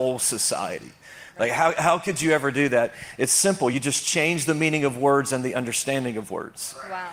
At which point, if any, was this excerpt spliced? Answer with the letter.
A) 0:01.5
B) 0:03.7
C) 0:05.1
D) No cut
D